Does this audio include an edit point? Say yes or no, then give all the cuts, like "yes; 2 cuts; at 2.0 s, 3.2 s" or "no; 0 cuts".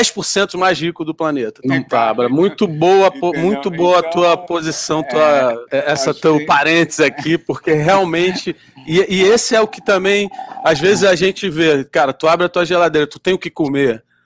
yes; 2 cuts; at 1.6 s, 5.7 s